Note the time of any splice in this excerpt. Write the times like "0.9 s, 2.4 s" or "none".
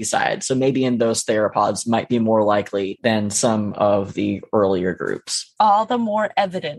5.6 s